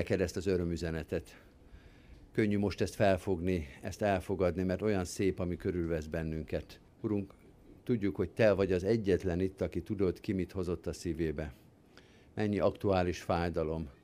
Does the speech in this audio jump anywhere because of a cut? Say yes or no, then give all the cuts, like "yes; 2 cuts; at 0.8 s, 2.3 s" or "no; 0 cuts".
yes; 1 cut; at 6.9 s